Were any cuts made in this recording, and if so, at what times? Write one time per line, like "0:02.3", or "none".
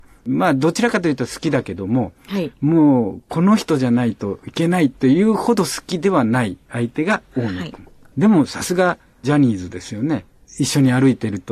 none